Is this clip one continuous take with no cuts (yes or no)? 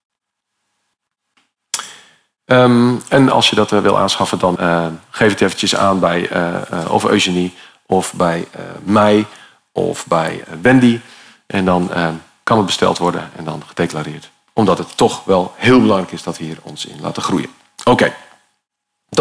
no